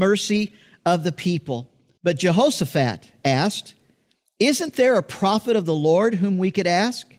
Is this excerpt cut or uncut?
cut